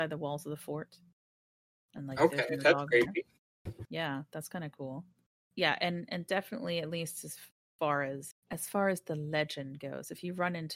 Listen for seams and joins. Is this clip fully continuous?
no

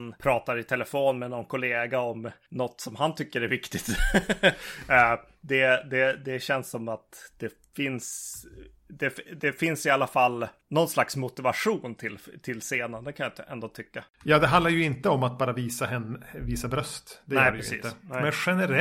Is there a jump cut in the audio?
no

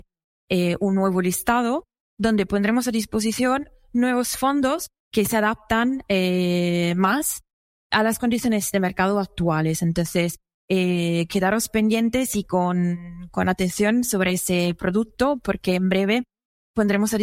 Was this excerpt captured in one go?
yes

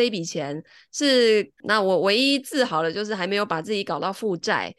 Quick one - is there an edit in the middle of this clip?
yes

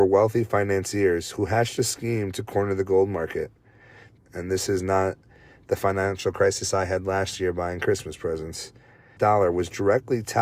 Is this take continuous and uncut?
no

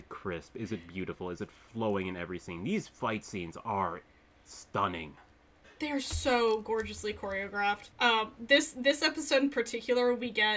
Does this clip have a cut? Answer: yes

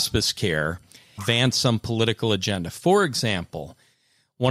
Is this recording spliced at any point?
yes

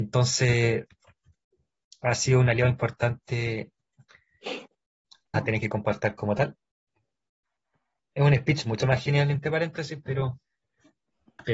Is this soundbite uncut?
no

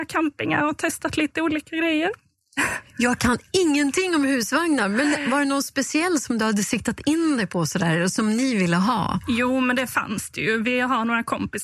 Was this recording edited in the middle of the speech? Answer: no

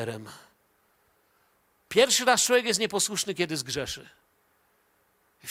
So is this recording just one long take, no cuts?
no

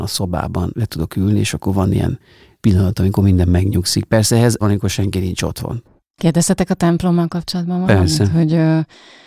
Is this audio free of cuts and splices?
no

